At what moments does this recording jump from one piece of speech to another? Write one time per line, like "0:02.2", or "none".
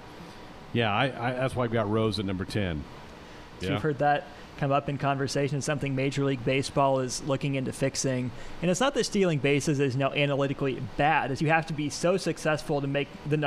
0:03.6
0:11.4